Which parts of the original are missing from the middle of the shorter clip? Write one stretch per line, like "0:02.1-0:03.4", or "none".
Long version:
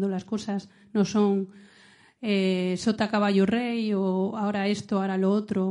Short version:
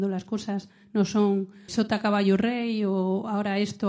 0:01.7-0:02.8